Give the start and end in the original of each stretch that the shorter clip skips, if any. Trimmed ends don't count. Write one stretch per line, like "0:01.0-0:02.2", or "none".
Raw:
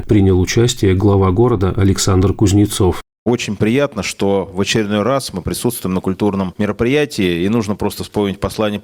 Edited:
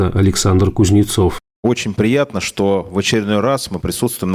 none